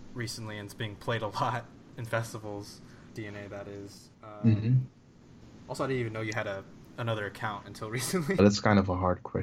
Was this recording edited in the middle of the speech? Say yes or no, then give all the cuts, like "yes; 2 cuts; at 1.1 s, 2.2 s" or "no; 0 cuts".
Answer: yes; 2 cuts; at 4.1 s, 8.4 s